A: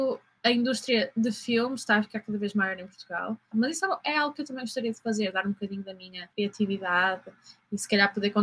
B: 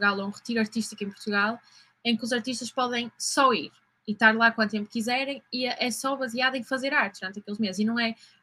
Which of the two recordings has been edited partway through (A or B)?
A